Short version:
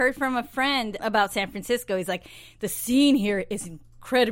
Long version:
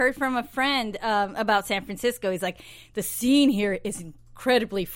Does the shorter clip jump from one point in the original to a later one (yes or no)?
yes